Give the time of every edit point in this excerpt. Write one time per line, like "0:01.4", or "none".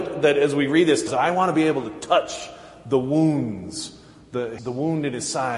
0:01.1
0:04.6